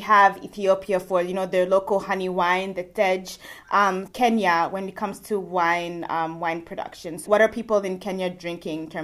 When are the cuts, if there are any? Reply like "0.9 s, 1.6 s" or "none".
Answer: 4.1 s, 7.2 s